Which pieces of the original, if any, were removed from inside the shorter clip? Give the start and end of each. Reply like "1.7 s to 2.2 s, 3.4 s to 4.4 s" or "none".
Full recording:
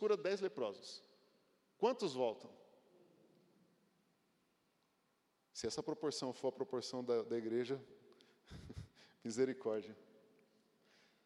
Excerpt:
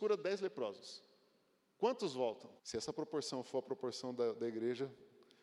2.6 s to 5.5 s